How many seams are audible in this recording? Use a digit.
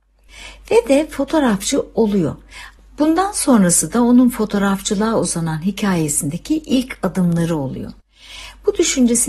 1